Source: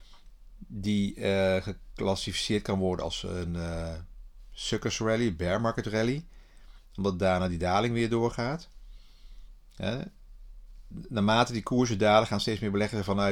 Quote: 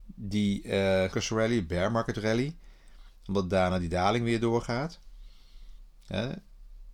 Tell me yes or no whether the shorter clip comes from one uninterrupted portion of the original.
no